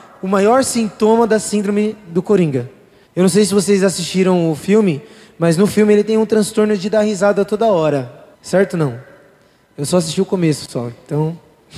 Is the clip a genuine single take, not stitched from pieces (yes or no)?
no